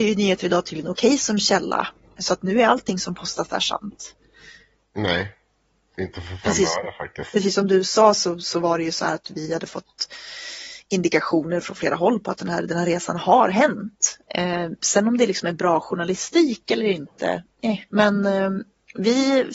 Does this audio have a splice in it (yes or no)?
yes